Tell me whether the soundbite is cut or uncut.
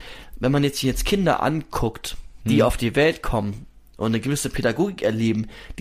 uncut